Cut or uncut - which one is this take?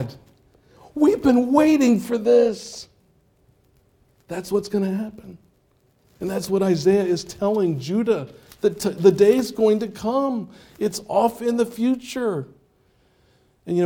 uncut